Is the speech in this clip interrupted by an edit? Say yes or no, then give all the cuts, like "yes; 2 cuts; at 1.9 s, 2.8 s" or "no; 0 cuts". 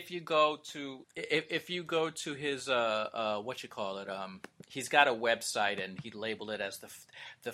yes; 1 cut; at 1.0 s